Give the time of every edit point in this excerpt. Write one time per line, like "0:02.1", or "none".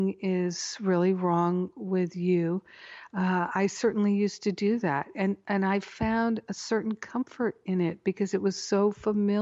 none